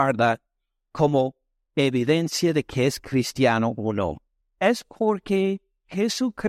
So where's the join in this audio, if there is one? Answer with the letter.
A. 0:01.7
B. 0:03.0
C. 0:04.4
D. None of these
C